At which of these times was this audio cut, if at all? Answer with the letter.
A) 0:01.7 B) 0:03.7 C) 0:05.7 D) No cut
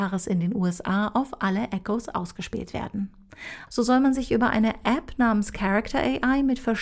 B